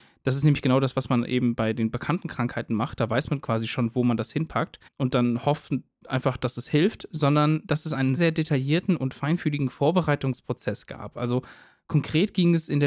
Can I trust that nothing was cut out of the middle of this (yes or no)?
no